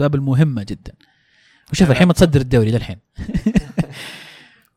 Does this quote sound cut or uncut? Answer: uncut